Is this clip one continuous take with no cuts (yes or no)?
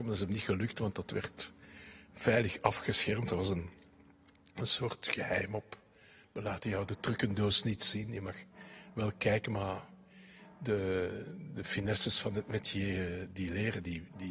yes